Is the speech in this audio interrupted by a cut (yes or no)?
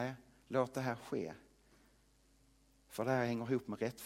no